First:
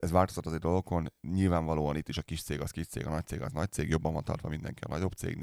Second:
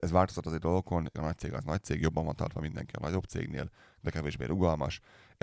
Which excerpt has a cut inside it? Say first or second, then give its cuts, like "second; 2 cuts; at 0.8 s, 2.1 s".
second; 1 cut; at 1.1 s